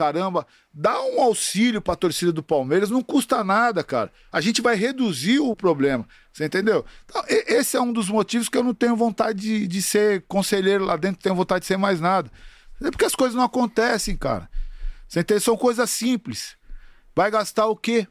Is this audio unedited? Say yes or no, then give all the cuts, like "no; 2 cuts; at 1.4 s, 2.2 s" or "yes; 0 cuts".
no; 1 cut; at 5.5 s